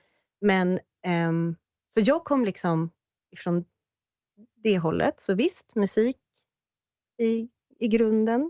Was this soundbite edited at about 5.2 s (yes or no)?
no